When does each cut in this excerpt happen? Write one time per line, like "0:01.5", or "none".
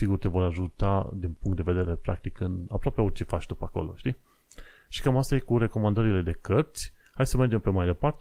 none